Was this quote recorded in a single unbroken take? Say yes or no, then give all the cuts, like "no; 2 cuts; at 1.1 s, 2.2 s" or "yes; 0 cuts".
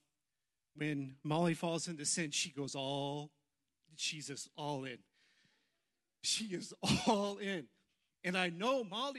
yes; 0 cuts